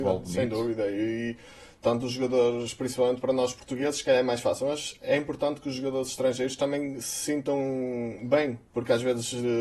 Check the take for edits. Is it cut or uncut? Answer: cut